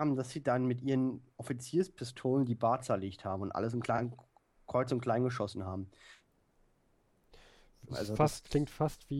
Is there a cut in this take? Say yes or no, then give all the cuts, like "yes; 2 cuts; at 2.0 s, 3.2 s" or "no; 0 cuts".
yes; 2 cuts; at 3.8 s, 7.9 s